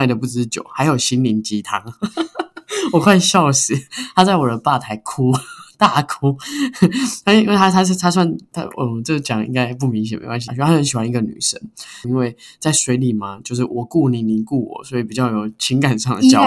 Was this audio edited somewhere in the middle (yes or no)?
yes